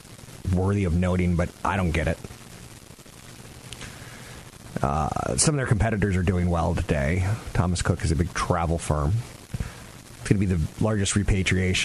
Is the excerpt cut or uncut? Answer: cut